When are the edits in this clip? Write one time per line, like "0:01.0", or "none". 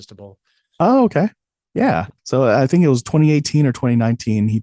0:02.2